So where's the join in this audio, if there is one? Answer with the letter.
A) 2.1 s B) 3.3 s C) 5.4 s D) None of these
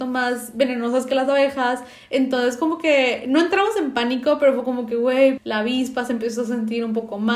C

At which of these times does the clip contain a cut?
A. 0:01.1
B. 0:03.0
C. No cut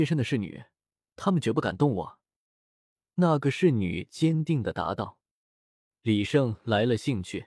A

